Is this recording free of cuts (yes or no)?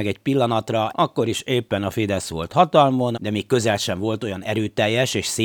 no